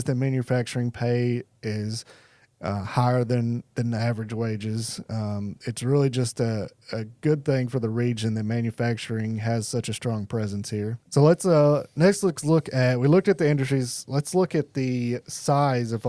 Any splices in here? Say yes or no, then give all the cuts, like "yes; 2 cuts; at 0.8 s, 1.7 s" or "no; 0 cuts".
yes; 2 cuts; at 5.1 s, 11.0 s